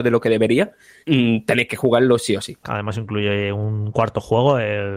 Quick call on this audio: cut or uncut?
cut